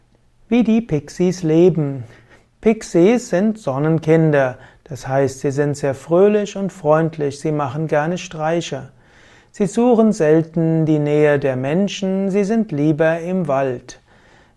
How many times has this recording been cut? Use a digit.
0